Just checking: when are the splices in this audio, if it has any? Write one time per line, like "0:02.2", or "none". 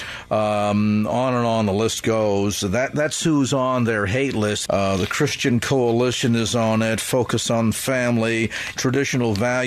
0:04.7
0:08.8